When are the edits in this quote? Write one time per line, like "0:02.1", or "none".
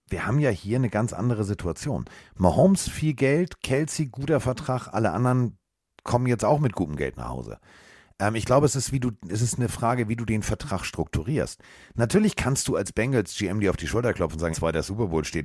0:14.5